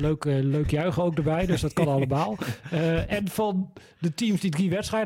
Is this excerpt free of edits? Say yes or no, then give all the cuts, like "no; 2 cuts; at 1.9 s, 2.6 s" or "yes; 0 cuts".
yes; 0 cuts